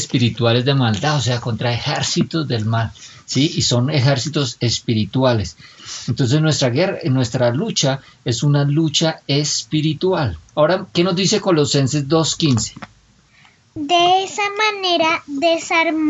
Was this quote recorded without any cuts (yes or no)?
no